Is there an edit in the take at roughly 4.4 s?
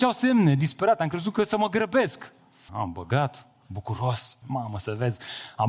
yes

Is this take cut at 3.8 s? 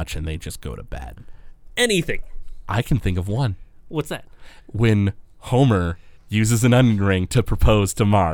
no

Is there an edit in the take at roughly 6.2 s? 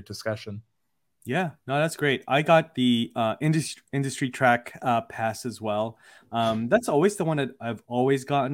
no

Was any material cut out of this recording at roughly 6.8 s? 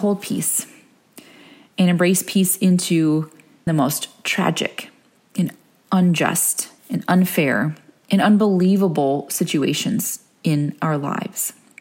yes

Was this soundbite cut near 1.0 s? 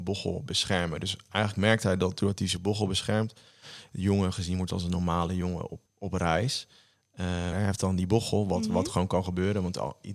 no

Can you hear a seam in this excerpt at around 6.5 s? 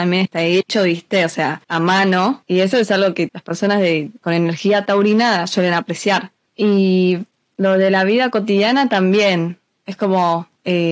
no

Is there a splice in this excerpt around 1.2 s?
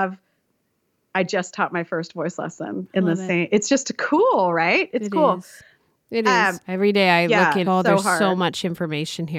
no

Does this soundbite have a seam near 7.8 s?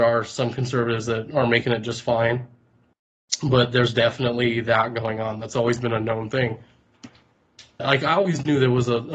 yes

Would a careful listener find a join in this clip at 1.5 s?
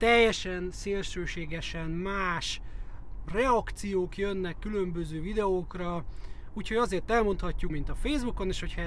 no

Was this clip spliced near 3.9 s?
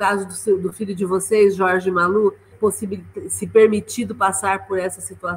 no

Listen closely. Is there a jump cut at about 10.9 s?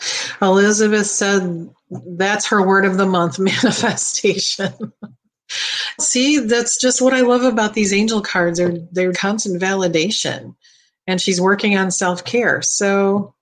no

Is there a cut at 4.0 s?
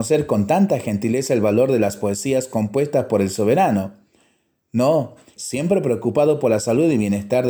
no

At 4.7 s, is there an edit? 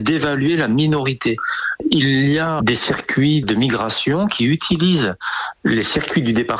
no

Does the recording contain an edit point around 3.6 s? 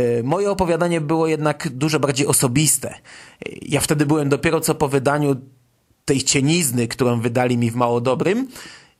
no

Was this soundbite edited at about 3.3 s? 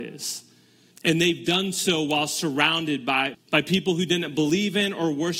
yes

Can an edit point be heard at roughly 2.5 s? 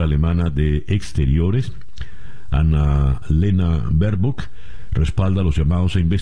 no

